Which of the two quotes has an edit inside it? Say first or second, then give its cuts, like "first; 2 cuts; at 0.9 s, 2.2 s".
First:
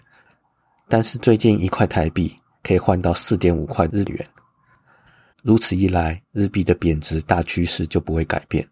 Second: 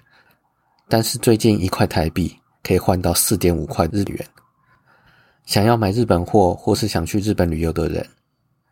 first; 1 cut; at 5.3 s